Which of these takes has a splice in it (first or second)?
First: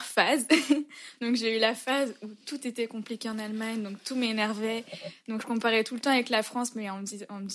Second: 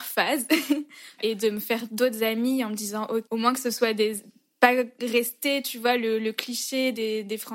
second